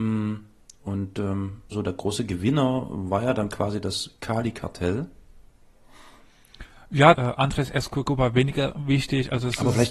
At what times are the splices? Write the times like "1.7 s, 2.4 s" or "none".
1.7 s, 7.1 s